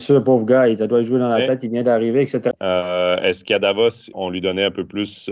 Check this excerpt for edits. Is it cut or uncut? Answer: cut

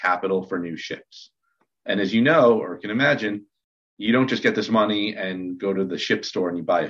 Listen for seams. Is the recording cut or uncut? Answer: uncut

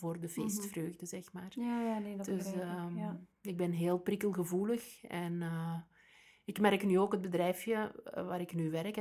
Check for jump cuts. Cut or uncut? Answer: uncut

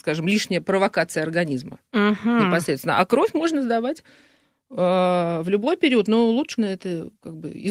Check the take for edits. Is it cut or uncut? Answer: cut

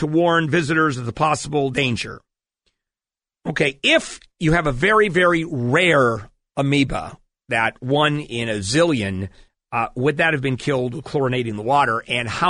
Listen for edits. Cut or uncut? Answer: uncut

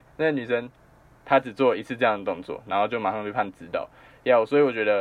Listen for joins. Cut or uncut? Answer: uncut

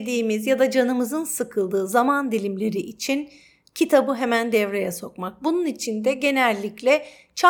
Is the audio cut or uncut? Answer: uncut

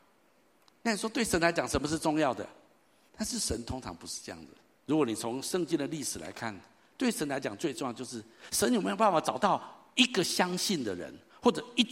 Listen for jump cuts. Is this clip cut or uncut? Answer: cut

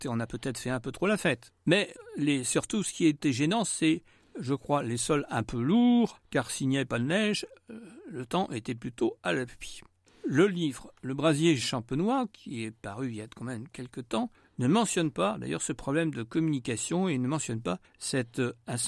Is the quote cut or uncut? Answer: uncut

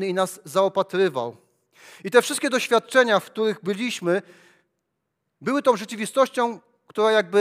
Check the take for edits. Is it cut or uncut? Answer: uncut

